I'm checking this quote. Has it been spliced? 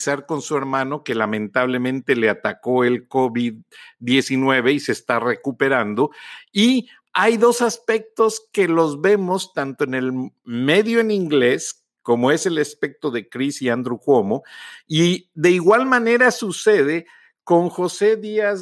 no; 0 cuts

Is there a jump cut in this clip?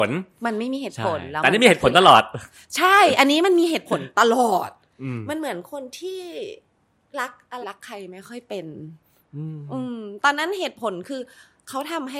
yes; 1 cut; at 7.6 s

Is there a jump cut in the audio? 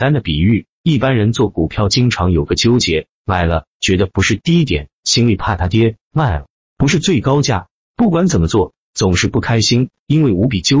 yes; 1 cut; at 7.9 s

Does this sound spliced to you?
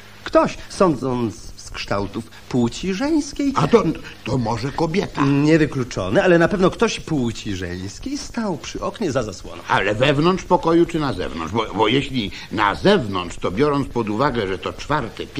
no; 0 cuts

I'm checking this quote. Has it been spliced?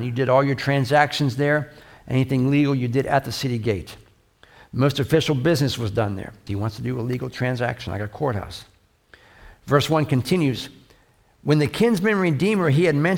yes; 1 cut; at 6.5 s

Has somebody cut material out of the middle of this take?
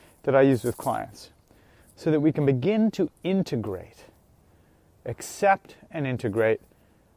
no; 0 cuts

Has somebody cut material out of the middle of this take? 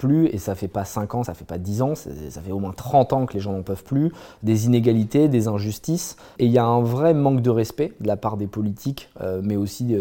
no; 0 cuts

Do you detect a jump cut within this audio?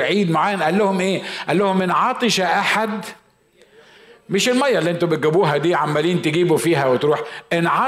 no; 0 cuts

